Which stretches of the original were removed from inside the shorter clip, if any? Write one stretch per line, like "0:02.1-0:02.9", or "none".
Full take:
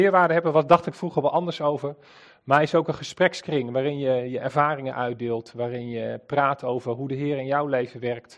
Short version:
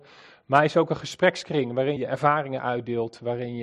0:03.9-0:04.3